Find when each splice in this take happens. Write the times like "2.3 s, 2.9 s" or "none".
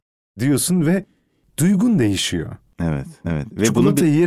3.2 s